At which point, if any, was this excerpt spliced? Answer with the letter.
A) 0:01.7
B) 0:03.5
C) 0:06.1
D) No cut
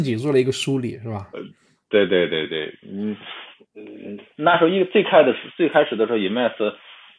D